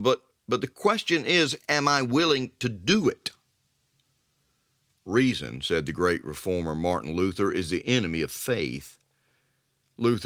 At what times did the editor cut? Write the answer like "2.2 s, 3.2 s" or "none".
none